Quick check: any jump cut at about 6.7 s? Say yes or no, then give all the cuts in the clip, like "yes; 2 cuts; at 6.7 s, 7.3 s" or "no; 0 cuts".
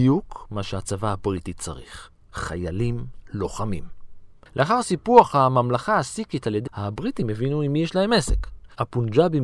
yes; 2 cuts; at 4.5 s, 6.7 s